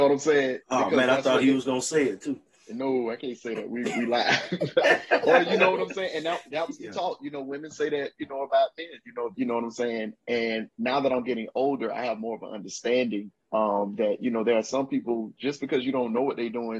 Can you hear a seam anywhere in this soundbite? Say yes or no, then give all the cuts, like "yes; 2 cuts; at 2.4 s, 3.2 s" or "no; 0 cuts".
yes; 2 cuts; at 9.3 s, 13.4 s